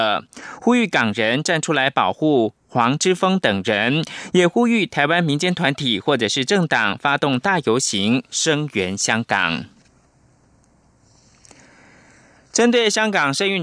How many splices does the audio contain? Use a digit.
0